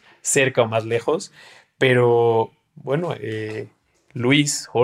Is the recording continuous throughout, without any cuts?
yes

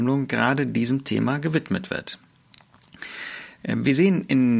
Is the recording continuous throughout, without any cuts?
no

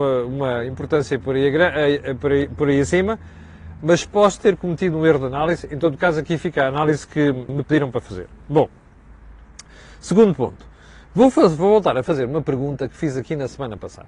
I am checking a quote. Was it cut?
yes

